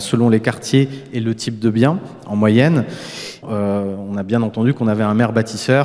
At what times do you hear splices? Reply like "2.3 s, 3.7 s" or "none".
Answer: 3.4 s